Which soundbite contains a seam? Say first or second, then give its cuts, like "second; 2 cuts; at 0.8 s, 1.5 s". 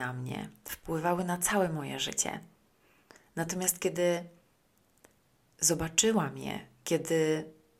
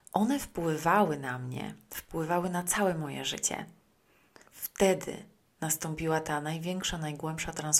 second; 1 cut; at 4.5 s